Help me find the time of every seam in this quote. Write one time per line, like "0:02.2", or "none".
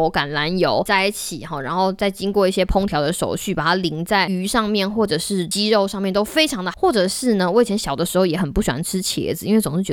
0:06.7